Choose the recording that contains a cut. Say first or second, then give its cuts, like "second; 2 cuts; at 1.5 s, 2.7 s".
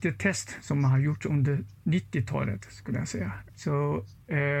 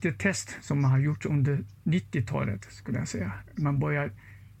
first; 1 cut; at 3.5 s